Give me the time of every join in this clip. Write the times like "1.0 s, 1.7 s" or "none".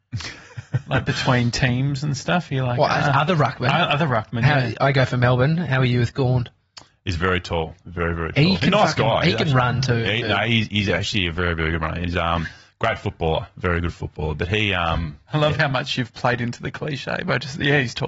none